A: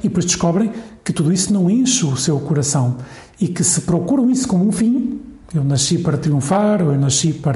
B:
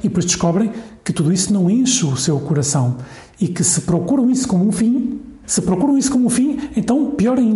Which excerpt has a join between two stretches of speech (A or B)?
B